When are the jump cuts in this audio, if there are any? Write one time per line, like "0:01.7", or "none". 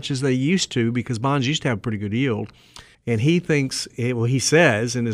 0:02.9